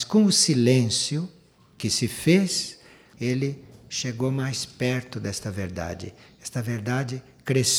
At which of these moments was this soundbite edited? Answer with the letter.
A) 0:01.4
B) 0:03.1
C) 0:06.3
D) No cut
B